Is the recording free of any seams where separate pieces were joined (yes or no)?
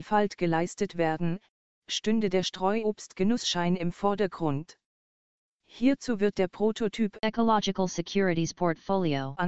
yes